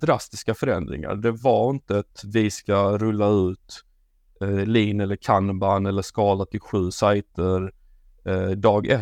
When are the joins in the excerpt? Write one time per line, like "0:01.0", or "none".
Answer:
none